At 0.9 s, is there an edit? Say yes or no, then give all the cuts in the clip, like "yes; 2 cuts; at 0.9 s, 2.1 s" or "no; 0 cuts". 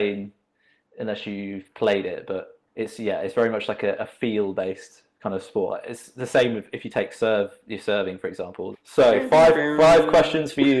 no; 3 cuts; at 2.7 s, 5.7 s, 8.7 s